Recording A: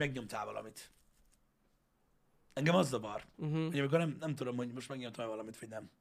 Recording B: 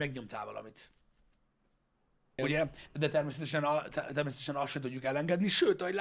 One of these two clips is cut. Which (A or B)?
B